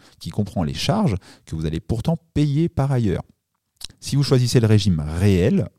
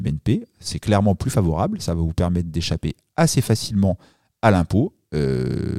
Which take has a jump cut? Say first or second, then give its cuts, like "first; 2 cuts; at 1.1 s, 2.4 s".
first; 1 cut; at 3.9 s